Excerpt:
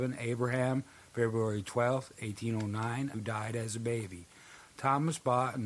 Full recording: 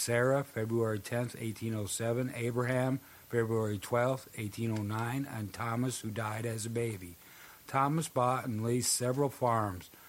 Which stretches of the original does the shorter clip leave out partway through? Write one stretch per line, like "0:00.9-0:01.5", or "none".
0:05.3-0:06.0

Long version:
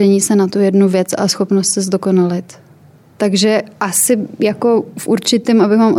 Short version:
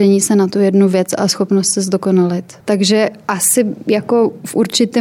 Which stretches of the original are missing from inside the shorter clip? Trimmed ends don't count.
0:02.6-0:03.1

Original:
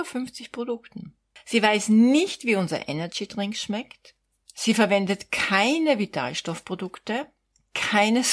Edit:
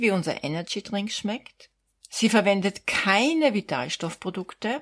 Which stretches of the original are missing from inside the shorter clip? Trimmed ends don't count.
none

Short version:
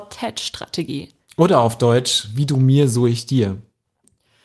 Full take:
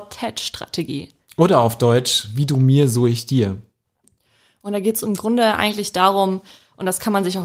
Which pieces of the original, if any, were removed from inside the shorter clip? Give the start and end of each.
none

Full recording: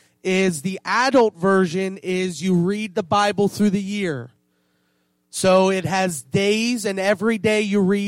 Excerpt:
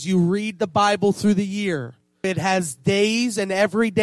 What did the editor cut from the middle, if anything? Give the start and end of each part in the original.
0:04.6-0:05.7

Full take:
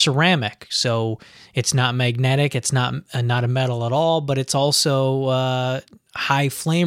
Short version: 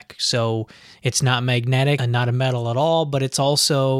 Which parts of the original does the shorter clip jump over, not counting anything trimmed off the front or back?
0:02.5-0:03.1

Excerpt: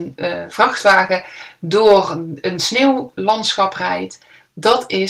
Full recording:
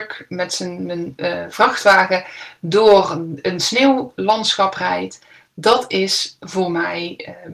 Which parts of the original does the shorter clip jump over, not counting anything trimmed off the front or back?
none

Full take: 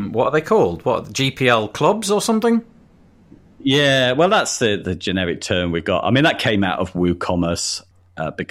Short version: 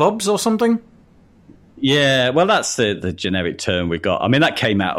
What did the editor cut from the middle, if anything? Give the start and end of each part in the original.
none

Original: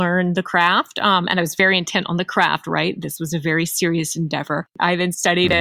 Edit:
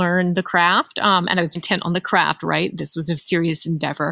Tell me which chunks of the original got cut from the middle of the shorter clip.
0:01.5-0:01.8
0:03.4-0:03.7

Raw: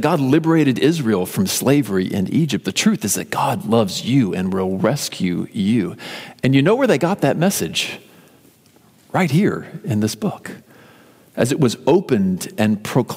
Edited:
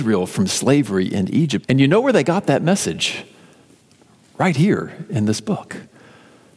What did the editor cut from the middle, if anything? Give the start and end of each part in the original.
0:02.6-0:06.4

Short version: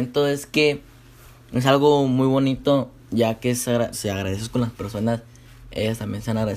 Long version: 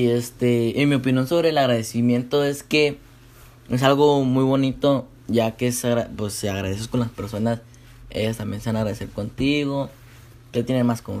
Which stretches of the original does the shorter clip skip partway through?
0:06.1-0:06.3

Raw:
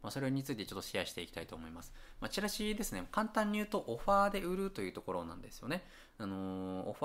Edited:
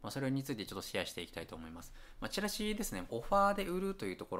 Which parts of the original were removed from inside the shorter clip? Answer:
0:03.1-0:03.8

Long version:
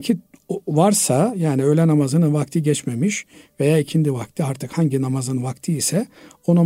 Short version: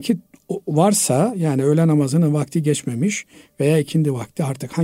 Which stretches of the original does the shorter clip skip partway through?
none

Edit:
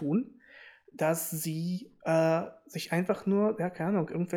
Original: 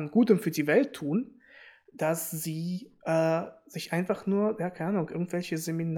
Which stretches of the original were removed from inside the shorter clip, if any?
none

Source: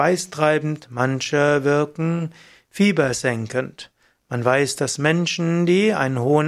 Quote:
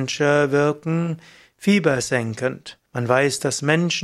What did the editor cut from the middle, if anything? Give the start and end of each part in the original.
0:04.0-0:04.2

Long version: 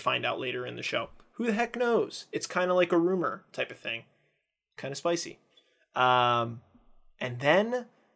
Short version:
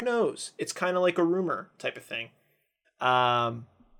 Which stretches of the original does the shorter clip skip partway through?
0:04.6-0:05.8

